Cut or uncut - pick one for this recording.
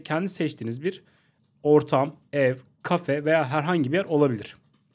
uncut